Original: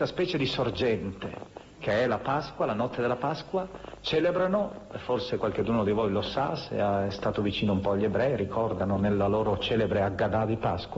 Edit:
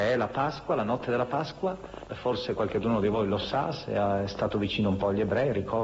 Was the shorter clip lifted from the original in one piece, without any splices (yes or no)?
no